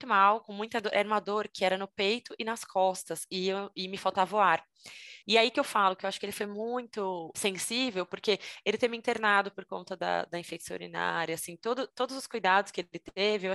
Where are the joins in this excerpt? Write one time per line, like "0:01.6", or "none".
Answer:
0:05.2